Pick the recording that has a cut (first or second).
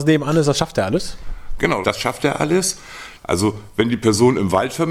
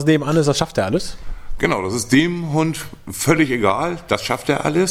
first